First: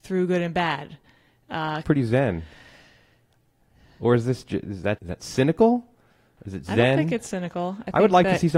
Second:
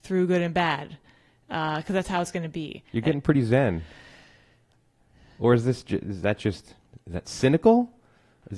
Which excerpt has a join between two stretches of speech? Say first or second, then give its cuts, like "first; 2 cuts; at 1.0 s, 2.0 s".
first; 2 cuts; at 1.8 s, 5.0 s